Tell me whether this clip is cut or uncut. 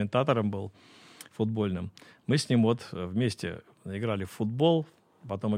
uncut